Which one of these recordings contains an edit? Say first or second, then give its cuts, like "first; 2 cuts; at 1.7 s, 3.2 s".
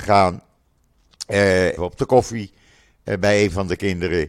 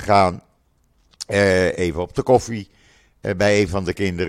first; 1 cut; at 1.8 s